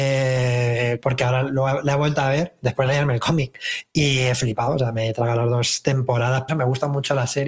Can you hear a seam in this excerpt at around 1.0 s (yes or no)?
yes